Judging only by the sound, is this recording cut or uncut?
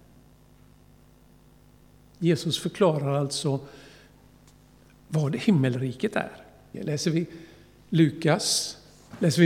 cut